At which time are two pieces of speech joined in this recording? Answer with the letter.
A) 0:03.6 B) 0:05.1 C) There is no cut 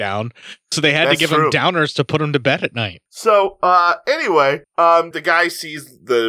B